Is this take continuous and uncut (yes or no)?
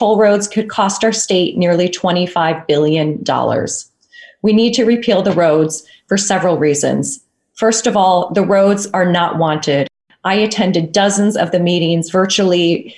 yes